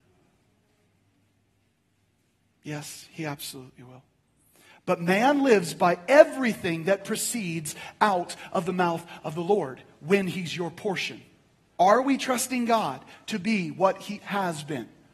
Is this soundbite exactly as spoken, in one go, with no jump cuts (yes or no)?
no